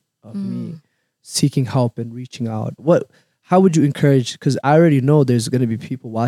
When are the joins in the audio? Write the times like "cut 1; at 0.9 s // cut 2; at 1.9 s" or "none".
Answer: cut 1; at 2.8 s // cut 2; at 4.6 s